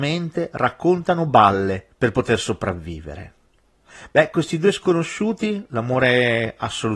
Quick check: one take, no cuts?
yes; 0 cuts

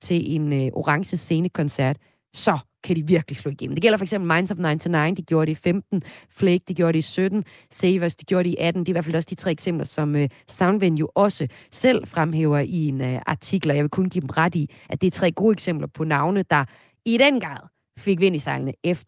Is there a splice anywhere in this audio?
no; 0 cuts

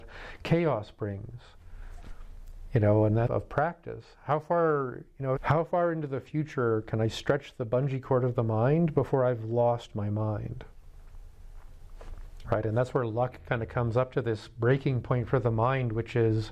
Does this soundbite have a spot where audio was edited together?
yes; 3 cuts; at 3.3 s, 5.4 s, 12.4 s

